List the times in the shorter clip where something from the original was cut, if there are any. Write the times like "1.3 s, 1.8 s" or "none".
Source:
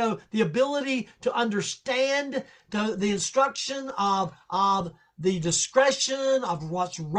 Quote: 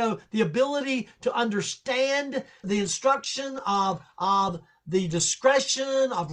2.6 s